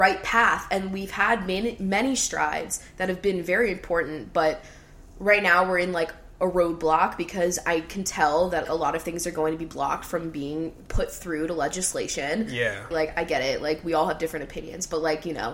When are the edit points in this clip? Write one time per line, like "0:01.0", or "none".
0:08.6
0:12.9